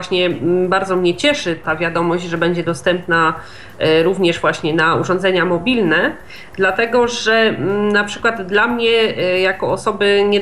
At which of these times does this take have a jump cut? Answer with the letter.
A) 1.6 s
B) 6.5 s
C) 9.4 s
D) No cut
A